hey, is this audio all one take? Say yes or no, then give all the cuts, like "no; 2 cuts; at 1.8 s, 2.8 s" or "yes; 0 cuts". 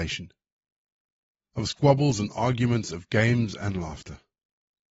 yes; 0 cuts